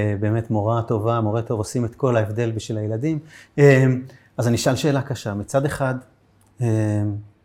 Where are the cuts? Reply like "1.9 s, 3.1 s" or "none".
none